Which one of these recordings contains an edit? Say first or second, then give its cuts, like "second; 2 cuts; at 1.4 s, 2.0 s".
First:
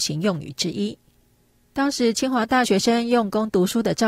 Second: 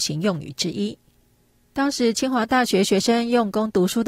first; 1 cut; at 2.6 s